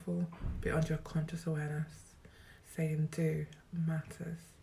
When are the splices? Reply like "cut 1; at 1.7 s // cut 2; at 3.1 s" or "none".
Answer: cut 1; at 2.6 s